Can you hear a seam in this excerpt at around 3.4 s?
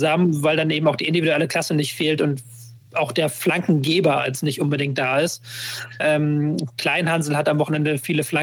no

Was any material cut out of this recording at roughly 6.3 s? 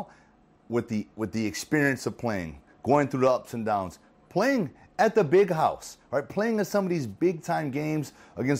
no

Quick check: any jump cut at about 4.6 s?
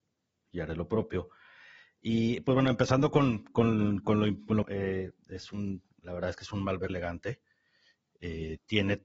yes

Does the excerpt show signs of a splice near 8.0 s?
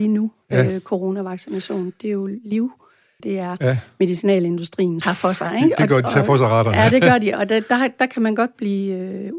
no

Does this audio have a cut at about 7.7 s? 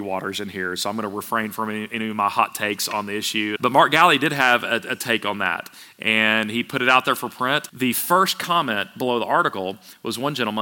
yes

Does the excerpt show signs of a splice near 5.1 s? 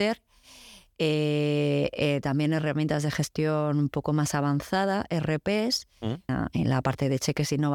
no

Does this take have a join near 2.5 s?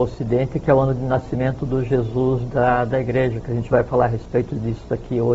no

